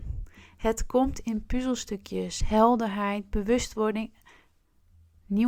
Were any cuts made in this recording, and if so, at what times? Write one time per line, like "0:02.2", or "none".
none